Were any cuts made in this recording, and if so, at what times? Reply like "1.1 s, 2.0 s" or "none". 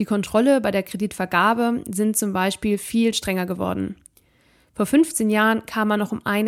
none